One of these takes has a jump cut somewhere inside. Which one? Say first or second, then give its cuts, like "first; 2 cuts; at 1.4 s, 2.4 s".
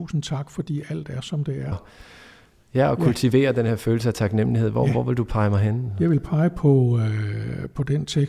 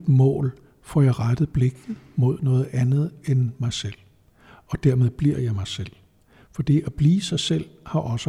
first; 1 cut; at 1.7 s